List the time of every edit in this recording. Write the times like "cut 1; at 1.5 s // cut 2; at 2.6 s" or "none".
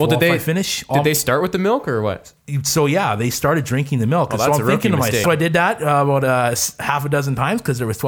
cut 1; at 5.2 s

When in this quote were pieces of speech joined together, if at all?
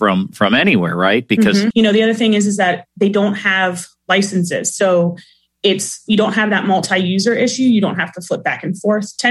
cut 1; at 1.7 s

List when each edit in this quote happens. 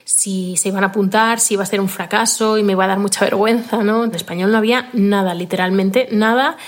cut 1; at 4.1 s

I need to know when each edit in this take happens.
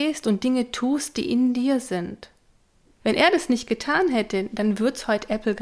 cut 1; at 3.0 s

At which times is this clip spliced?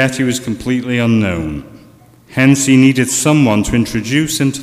none

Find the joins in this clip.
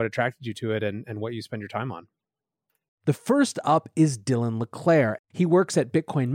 cut 1; at 2.9 s // cut 2; at 5.2 s

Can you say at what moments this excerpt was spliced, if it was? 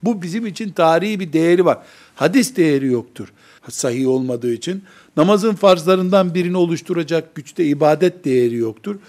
cut 1; at 3.6 s

